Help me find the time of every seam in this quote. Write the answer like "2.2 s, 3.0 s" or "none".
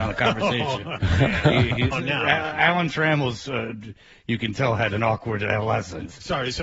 1.9 s